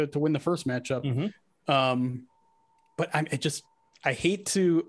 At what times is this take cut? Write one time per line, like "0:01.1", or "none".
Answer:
none

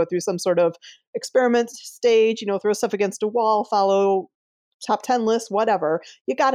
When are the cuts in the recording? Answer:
none

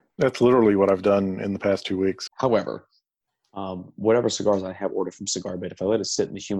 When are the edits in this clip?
0:02.3

